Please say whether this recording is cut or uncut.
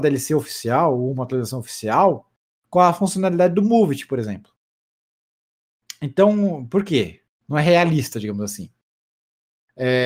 cut